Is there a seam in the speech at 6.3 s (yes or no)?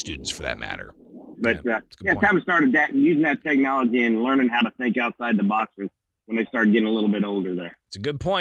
no